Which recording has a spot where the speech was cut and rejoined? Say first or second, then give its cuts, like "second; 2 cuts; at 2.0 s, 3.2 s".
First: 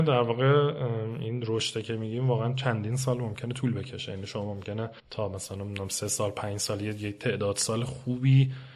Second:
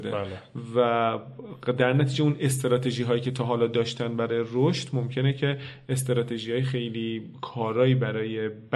first; 1 cut; at 5.0 s